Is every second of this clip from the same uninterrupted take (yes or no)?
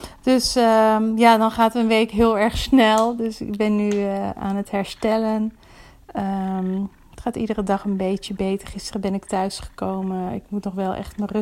yes